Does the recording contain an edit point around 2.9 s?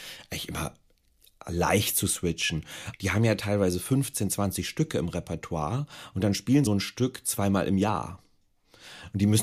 yes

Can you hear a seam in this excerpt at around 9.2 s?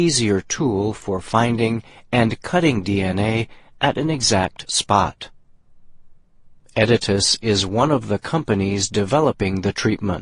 no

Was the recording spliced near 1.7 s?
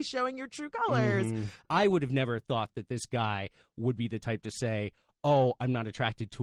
yes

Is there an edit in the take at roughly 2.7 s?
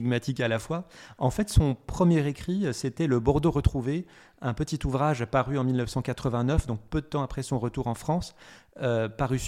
no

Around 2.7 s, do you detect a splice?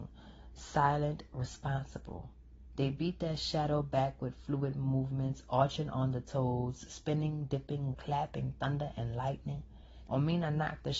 no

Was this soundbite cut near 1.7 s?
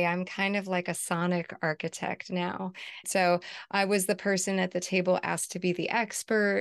no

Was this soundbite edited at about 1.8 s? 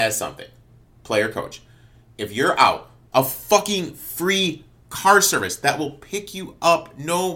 no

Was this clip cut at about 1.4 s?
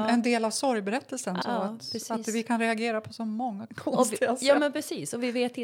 yes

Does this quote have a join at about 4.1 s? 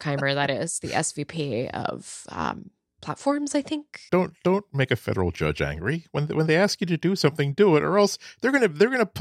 yes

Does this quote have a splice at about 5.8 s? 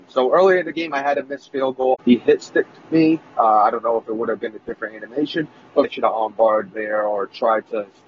yes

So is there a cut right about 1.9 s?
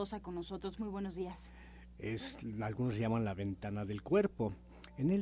yes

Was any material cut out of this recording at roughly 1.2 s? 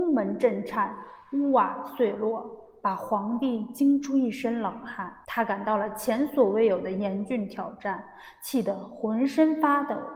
no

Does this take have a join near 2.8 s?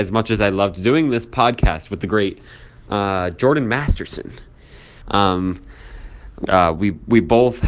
no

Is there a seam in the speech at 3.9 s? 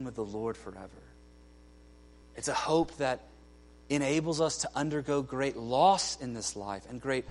no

